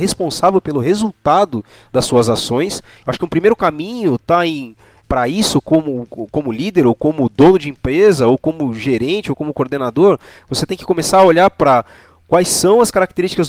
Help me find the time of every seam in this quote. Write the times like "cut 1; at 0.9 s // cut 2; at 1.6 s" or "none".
cut 1; at 3.0 s // cut 2; at 5.0 s // cut 3; at 6.1 s